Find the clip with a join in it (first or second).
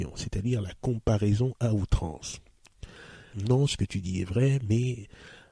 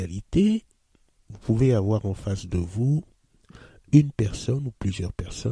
first